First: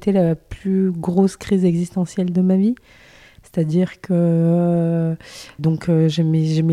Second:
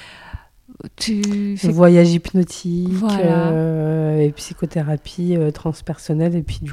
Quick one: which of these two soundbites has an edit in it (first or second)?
first